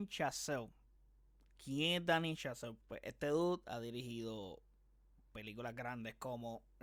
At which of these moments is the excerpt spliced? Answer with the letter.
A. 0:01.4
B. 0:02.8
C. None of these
B